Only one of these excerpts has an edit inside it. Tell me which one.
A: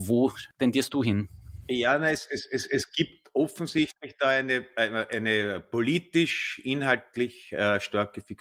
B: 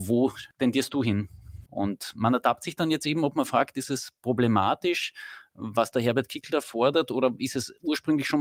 B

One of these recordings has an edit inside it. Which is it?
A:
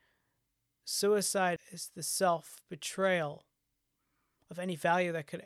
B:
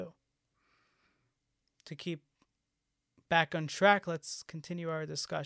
A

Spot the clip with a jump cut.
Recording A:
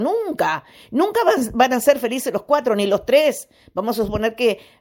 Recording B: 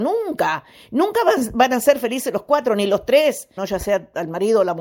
B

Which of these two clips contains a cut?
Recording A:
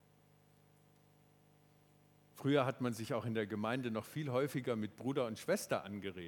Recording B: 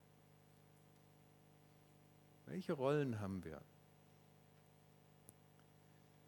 A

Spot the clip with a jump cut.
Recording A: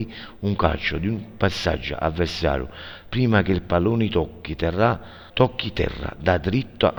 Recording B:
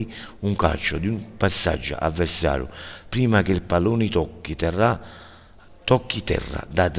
A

